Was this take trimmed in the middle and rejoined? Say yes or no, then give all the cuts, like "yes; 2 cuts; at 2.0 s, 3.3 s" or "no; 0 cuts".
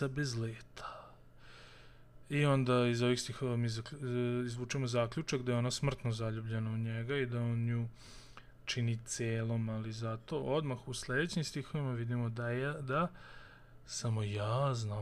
no; 0 cuts